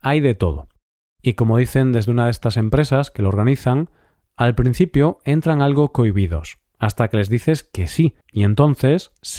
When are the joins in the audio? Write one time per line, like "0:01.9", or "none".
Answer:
0:08.2